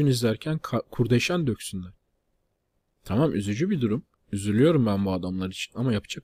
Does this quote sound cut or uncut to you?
uncut